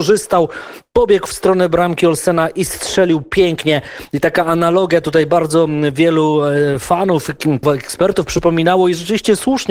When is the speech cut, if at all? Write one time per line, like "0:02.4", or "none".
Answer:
0:07.6